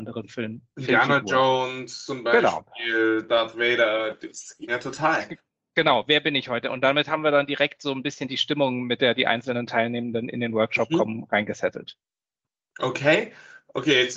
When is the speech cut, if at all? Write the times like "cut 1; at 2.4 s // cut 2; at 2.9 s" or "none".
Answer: cut 1; at 4.7 s